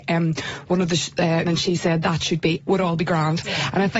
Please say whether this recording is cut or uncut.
cut